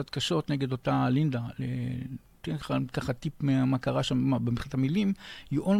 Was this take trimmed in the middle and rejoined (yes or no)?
no